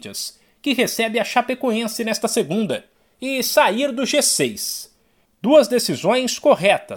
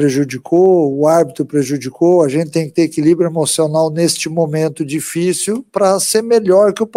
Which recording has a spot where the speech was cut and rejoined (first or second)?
first